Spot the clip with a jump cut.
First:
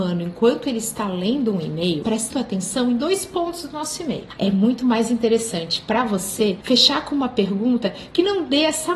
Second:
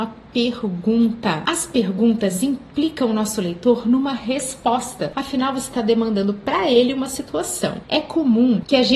first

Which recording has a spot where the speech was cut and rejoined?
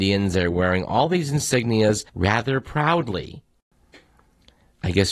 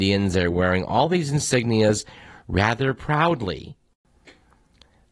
first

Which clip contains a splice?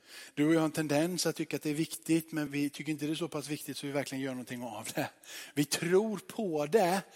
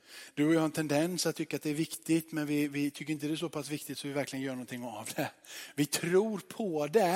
first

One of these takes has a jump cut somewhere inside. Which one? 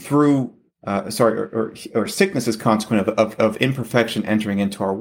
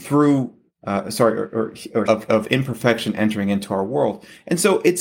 second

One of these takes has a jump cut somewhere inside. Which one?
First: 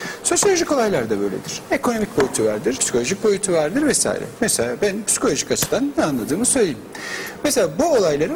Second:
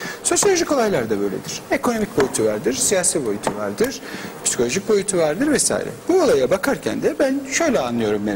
first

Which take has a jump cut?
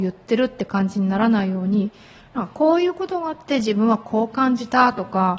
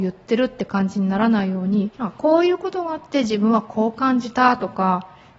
second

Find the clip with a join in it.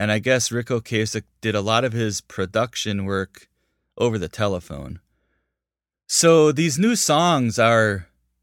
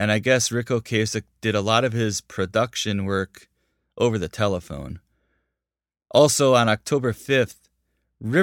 first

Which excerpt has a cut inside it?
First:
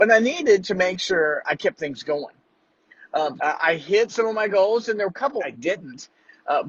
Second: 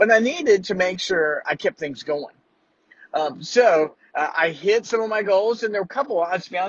first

